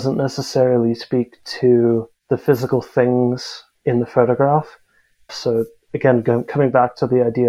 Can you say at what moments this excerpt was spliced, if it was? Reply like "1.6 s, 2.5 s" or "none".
5.3 s